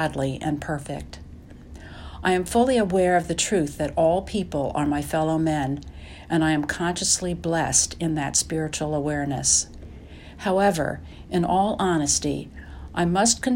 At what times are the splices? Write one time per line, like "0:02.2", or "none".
none